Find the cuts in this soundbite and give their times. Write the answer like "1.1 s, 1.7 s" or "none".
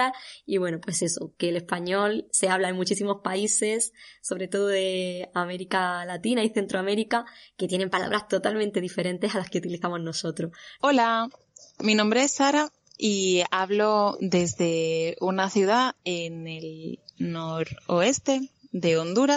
10.8 s